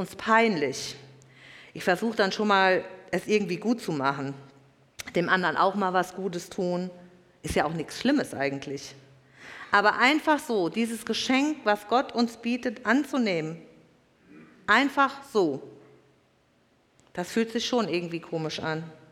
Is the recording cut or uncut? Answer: uncut